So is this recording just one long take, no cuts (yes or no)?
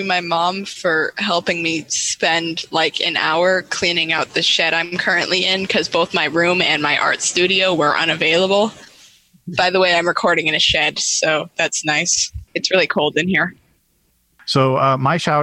yes